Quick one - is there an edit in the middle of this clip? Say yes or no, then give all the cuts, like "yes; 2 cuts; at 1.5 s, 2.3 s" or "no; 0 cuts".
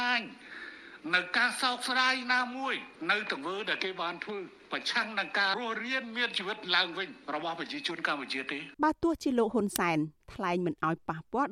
yes; 2 cuts; at 5.5 s, 8.7 s